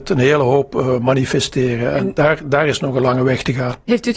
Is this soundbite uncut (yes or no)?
yes